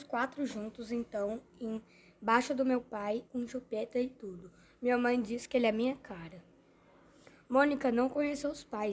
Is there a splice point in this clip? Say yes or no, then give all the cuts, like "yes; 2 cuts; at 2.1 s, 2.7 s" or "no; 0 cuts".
yes; 1 cut; at 3.3 s